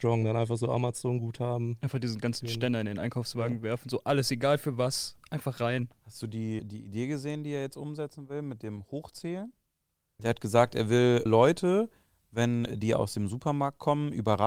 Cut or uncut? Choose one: cut